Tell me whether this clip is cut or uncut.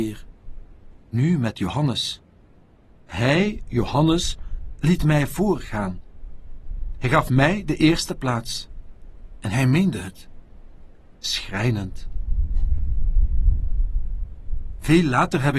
uncut